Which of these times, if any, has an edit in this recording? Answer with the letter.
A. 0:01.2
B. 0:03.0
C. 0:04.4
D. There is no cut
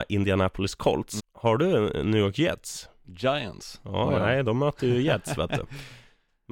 A